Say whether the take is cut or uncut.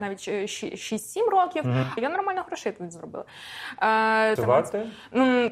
cut